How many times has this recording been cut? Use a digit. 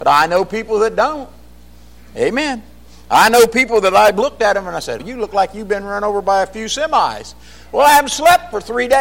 1